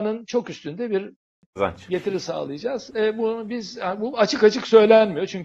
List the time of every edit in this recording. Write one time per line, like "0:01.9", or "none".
none